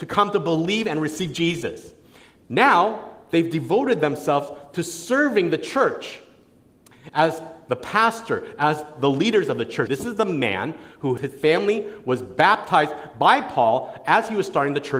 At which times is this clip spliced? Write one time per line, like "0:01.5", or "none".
0:09.9
0:11.2